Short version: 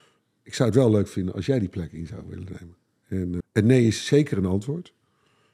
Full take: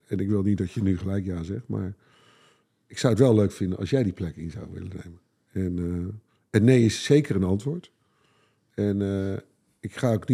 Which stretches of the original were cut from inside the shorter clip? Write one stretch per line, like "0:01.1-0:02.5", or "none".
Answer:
0:05.8-0:06.4